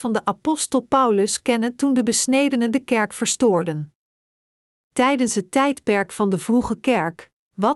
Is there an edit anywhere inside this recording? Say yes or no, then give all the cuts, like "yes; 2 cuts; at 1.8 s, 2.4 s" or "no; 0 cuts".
no; 0 cuts